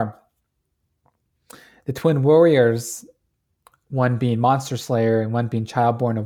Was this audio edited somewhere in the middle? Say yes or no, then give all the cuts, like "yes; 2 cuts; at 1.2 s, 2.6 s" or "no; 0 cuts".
no; 0 cuts